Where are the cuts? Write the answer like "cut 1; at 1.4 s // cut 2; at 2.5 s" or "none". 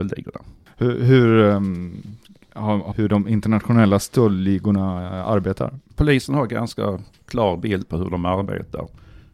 cut 1; at 2.9 s